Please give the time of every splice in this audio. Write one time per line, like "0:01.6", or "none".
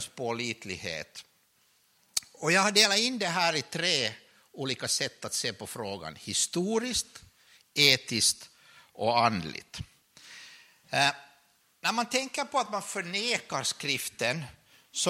none